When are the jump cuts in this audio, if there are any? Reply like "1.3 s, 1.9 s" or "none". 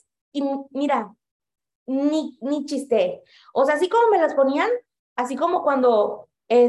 none